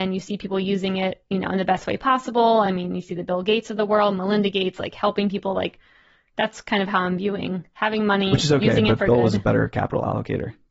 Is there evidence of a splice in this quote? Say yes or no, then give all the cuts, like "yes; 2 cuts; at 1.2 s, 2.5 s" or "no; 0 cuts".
no; 0 cuts